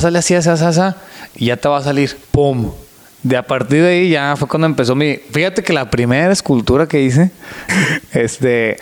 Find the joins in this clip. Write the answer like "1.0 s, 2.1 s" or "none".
2.2 s, 7.7 s

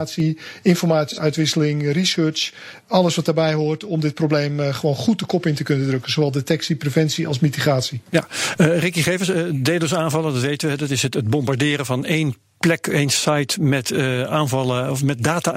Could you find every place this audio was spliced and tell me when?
none

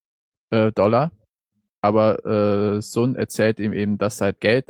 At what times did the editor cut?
none

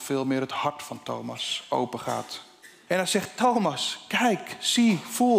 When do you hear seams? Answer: 2.9 s

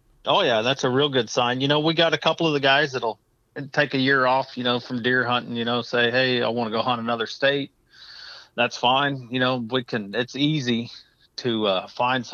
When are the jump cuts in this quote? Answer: none

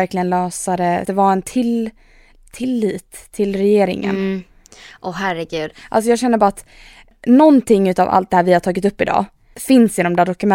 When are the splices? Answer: 1.0 s

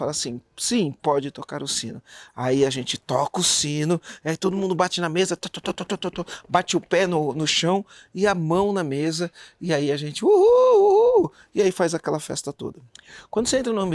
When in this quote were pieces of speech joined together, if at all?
none

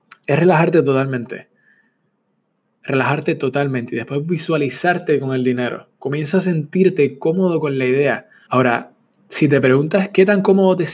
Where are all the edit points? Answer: 8.5 s

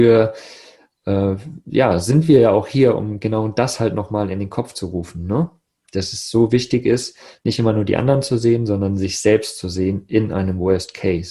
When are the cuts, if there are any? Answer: none

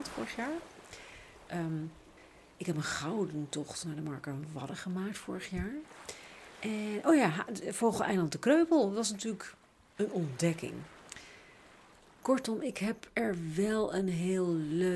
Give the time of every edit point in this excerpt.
1.5 s

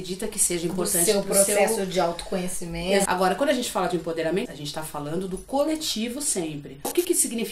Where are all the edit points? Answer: 3.1 s, 4.5 s

